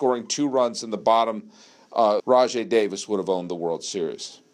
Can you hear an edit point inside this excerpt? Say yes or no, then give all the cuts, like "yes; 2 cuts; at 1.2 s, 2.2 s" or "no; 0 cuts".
yes; 1 cut; at 2.2 s